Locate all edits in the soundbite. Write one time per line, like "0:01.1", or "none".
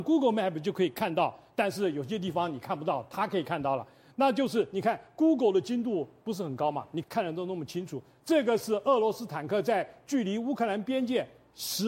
0:07.0